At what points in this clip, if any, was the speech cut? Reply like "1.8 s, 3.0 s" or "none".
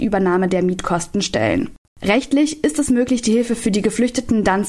1.9 s